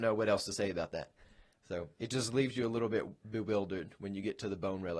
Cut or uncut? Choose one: uncut